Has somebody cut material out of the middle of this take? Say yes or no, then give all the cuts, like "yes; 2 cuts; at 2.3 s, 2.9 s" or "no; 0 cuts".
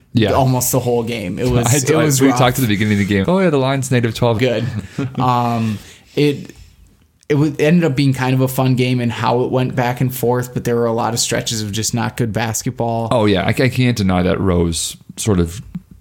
yes; 2 cuts; at 3.2 s, 4.4 s